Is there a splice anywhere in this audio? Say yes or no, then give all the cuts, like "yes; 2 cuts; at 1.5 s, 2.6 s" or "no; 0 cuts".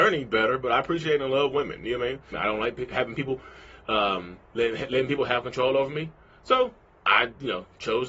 yes; 1 cut; at 2.3 s